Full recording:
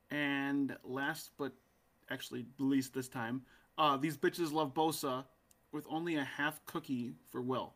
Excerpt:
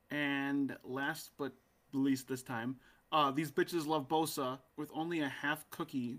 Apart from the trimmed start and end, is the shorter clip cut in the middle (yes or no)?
yes